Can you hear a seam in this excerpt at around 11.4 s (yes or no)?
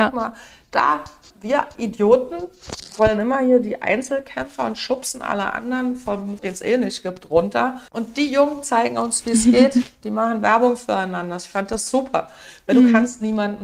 no